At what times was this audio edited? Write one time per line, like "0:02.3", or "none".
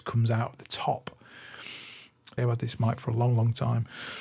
0:02.4